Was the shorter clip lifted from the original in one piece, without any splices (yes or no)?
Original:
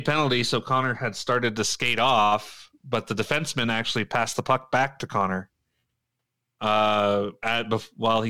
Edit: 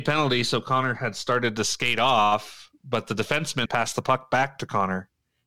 no